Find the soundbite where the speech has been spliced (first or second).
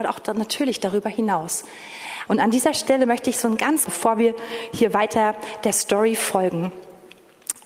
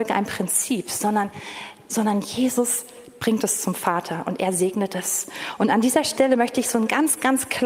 first